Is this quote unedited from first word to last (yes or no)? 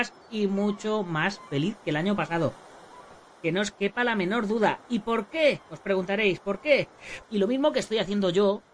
no